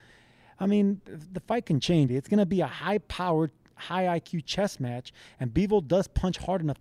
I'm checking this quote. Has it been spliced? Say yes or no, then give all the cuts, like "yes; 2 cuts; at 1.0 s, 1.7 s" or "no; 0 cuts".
yes; 1 cut; at 2.1 s